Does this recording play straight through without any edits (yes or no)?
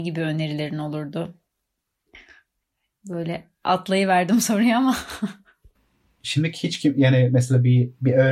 yes